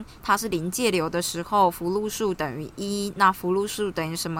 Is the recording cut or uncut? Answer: uncut